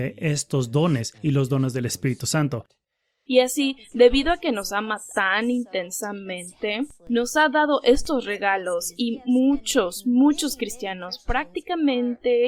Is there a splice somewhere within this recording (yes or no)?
yes